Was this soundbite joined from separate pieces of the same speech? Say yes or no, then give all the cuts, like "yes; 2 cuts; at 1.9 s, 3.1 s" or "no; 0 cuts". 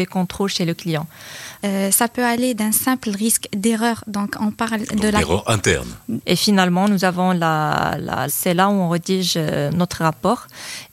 yes; 3 cuts; at 1.6 s, 6.2 s, 8.3 s